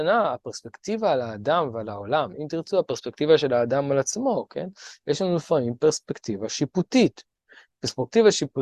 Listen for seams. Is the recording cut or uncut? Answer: uncut